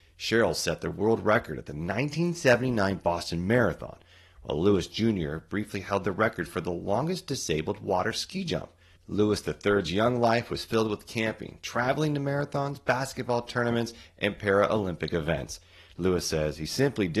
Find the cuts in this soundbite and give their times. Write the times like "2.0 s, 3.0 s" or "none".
none